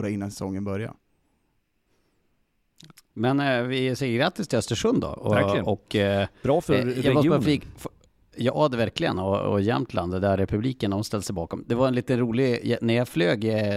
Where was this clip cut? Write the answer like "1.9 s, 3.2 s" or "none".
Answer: none